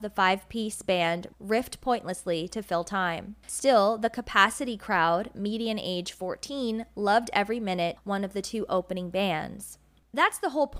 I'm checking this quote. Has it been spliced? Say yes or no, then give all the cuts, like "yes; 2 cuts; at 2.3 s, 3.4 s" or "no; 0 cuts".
yes; 1 cut; at 8.0 s